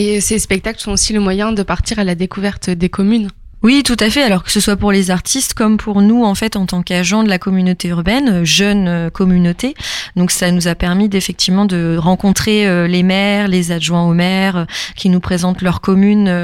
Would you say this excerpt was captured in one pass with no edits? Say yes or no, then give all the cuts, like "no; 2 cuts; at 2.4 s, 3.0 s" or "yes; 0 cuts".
yes; 0 cuts